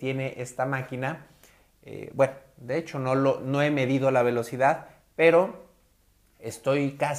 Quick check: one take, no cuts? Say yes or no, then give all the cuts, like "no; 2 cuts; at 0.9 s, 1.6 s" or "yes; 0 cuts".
yes; 0 cuts